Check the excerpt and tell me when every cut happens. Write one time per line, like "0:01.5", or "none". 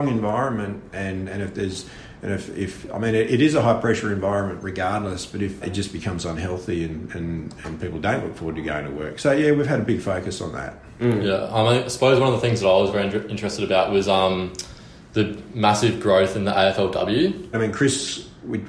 0:05.6
0:17.5